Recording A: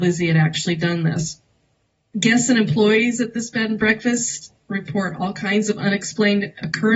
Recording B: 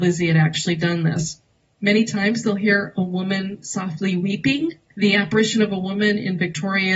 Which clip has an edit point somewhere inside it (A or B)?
B